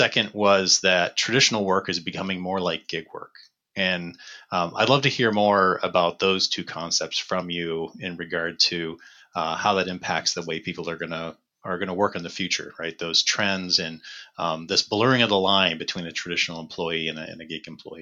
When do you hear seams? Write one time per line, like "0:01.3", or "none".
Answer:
none